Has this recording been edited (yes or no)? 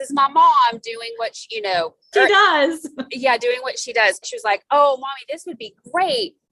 yes